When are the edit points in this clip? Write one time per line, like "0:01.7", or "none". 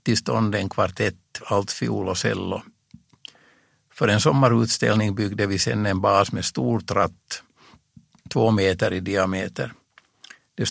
0:01.4